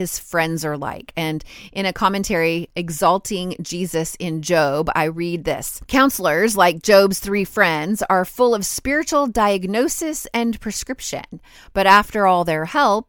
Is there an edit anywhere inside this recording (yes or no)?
no